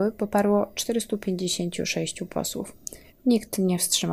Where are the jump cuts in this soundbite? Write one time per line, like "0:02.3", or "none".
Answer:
0:03.1